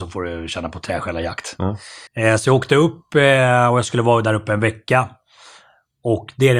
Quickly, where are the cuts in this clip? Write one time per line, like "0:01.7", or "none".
0:02.1